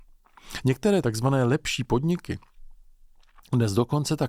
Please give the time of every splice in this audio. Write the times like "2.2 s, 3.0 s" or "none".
none